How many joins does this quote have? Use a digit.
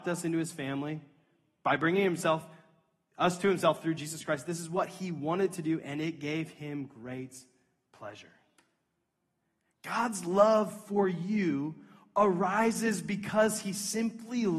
0